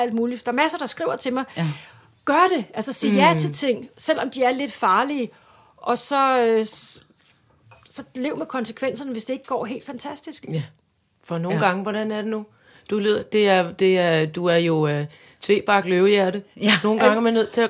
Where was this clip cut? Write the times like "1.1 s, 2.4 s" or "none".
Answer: none